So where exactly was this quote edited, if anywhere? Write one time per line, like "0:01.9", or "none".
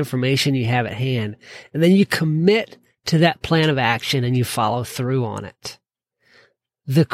none